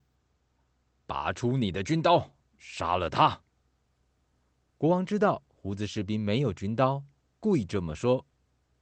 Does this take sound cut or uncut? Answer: uncut